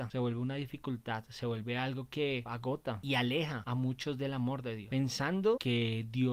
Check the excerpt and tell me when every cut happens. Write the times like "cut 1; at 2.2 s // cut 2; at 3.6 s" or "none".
cut 1; at 2.5 s